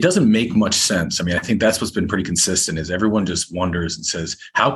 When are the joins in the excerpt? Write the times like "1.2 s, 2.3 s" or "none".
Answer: none